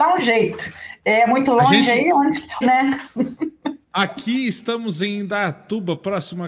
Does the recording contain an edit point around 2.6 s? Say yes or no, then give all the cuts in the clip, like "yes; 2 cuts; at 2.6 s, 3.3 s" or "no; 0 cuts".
yes; 1 cut; at 2.6 s